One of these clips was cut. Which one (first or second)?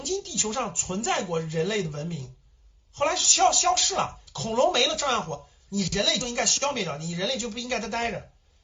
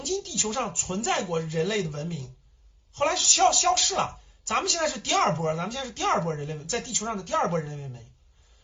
first